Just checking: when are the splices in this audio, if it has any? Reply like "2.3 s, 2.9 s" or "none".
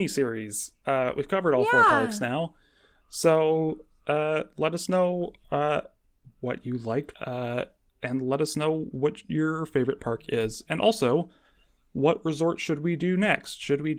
7.1 s